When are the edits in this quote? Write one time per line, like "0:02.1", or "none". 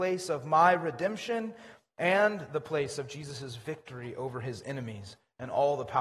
none